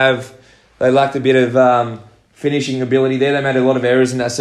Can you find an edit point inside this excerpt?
no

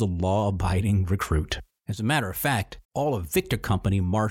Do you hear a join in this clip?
yes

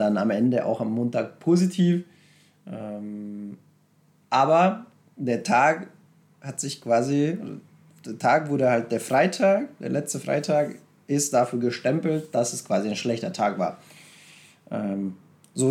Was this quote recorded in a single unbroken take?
yes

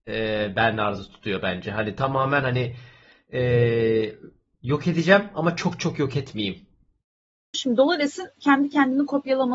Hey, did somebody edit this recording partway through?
yes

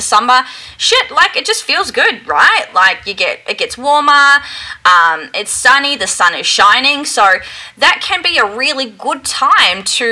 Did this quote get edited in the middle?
no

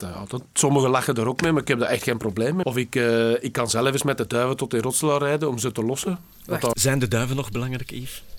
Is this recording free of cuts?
no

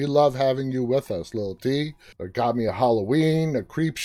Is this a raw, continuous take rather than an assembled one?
no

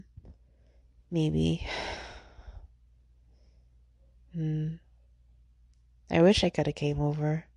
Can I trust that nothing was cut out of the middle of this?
yes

